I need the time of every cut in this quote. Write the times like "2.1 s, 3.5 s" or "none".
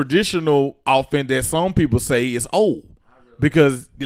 none

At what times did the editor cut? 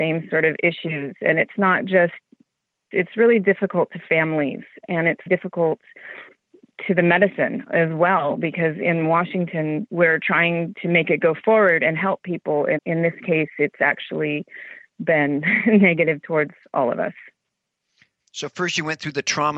5.3 s, 12.8 s

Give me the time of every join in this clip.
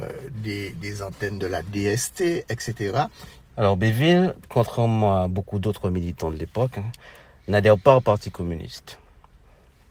3.4 s

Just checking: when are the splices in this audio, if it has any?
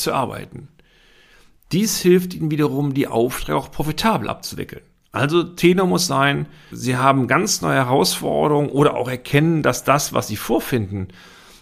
6.7 s

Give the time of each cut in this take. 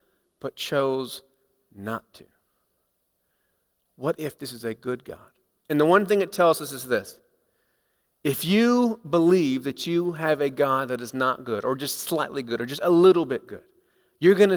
5.7 s

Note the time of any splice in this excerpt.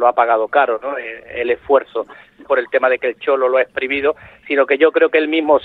2.5 s

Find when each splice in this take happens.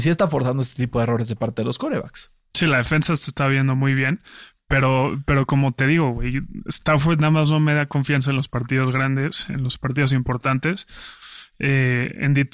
none

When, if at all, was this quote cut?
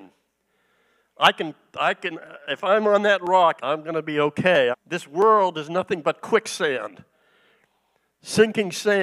3.6 s, 4.7 s

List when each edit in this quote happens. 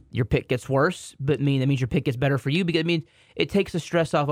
none

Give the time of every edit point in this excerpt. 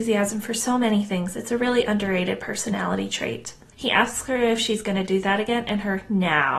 3.7 s

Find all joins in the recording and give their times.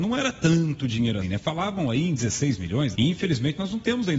1.2 s, 2.9 s

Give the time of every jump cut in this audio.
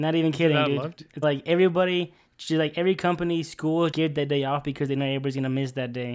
1.2 s, 3.9 s

